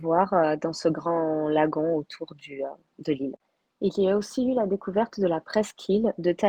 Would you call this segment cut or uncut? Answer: uncut